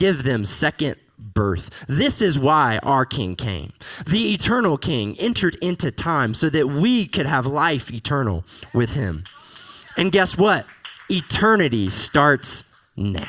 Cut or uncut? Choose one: uncut